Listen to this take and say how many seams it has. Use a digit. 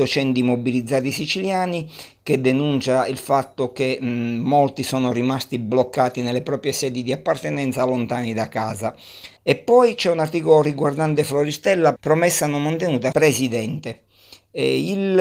3